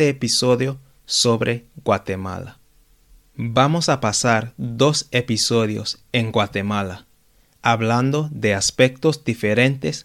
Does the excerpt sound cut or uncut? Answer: uncut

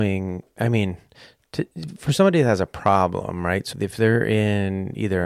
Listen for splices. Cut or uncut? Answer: cut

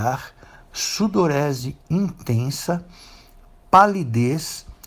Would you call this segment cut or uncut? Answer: uncut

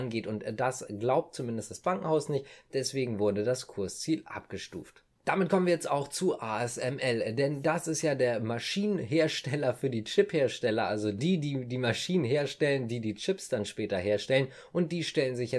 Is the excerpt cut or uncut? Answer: uncut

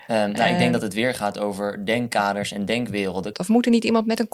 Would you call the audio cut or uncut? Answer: cut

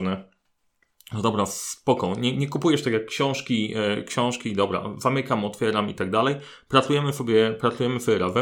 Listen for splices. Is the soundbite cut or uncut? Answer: uncut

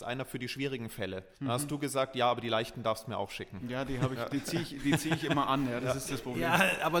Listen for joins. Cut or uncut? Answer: cut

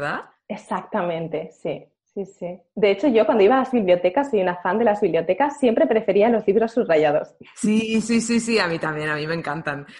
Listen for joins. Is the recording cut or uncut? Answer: uncut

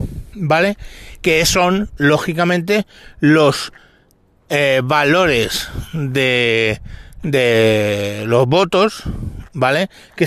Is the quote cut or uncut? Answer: uncut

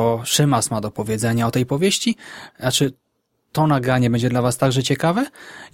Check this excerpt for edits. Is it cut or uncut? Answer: cut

